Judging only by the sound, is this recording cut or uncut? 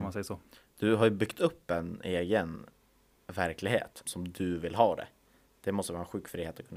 cut